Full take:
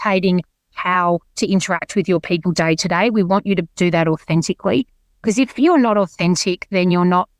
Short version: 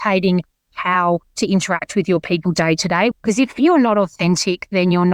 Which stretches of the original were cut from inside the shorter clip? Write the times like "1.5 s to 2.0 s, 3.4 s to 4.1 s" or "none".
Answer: 3.1 s to 5.1 s